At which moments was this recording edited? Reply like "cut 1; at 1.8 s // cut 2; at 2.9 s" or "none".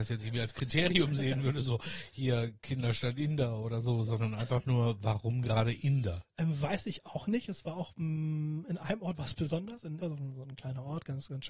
cut 1; at 10.0 s